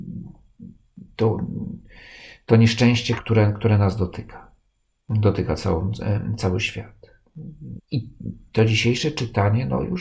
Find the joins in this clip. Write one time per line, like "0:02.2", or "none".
0:03.2
0:07.8

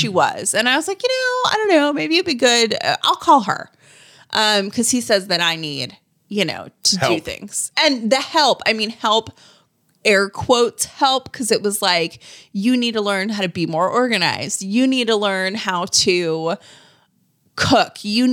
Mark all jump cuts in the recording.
none

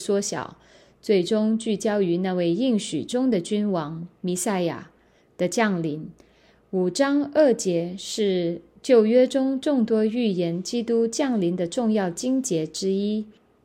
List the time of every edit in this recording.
none

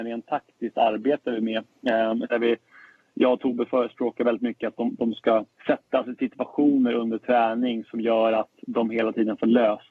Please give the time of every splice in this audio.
0:02.3
0:05.5

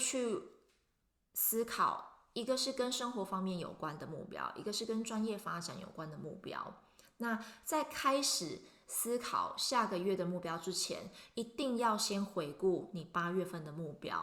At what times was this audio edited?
none

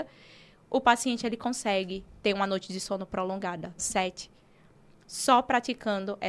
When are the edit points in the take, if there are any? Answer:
0:03.8

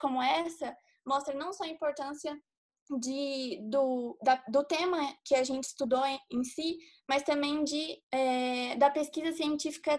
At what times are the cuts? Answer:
0:08.0

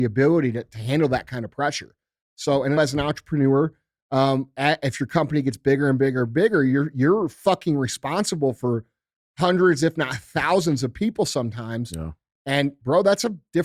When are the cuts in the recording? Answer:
0:02.8

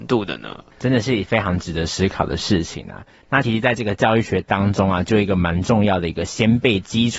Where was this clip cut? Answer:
0:03.4

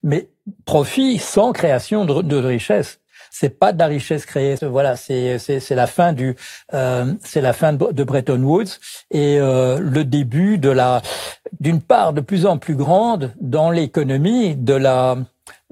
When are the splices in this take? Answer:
0:03.3
0:04.6
0:11.6

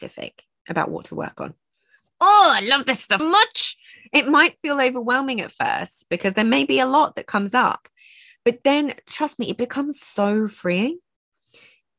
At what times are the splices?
0:03.2

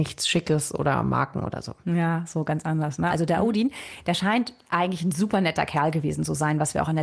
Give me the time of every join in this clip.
0:03.1

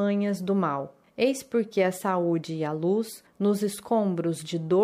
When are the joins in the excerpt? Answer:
none

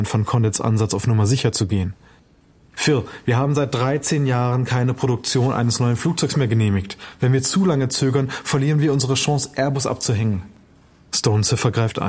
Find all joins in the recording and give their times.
none

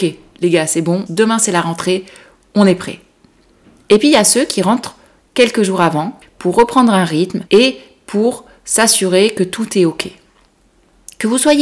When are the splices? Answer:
0:01.1
0:06.2
0:07.5

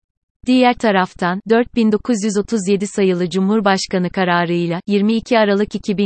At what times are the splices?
0:01.4

